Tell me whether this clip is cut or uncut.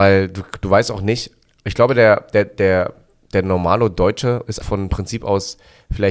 cut